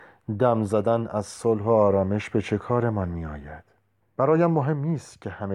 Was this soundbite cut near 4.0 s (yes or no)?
yes